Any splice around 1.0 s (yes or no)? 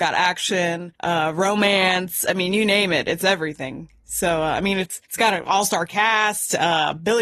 yes